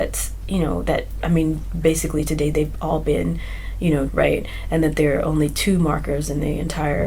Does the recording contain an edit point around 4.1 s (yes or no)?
yes